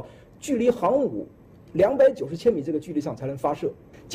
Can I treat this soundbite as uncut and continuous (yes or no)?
yes